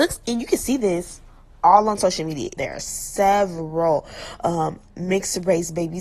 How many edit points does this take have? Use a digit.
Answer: 1